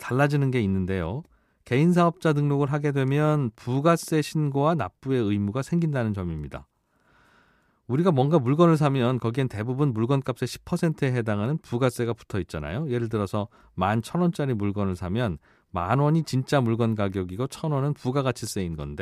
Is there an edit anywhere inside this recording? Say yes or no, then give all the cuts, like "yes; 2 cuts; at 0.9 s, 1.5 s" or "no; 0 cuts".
no; 0 cuts